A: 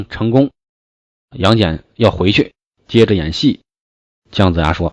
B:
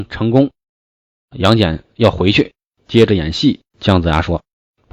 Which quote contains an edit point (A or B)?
B